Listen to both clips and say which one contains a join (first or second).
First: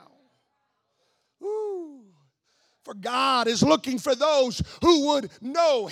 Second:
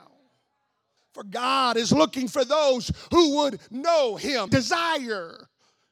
second